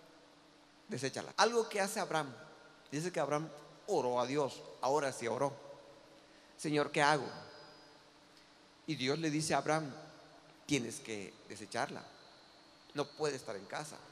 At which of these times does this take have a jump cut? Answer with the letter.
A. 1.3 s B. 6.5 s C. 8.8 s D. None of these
A